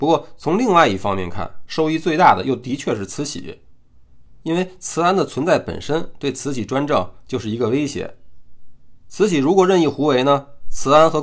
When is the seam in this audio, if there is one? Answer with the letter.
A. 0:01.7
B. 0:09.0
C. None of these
A